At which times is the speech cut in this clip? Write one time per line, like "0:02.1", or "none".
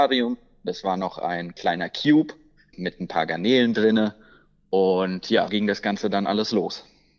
0:02.7
0:05.5